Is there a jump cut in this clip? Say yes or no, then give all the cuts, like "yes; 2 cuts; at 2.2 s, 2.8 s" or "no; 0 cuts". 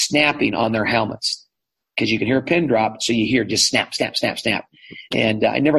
no; 0 cuts